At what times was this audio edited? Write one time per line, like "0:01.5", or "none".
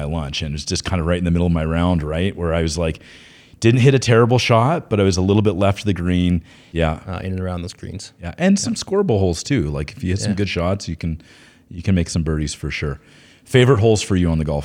0:06.7